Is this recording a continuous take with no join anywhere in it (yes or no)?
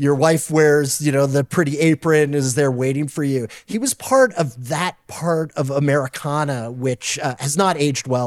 yes